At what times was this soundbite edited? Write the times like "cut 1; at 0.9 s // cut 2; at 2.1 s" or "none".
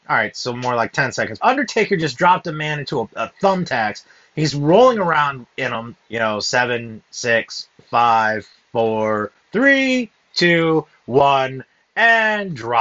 cut 1; at 1.4 s // cut 2; at 3.0 s // cut 3; at 6.0 s